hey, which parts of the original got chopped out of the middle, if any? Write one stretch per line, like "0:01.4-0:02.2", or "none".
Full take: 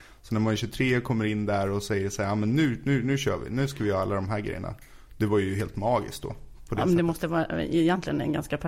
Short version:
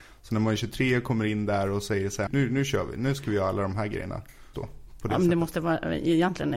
0:02.3-0:02.8
0:05.1-0:06.2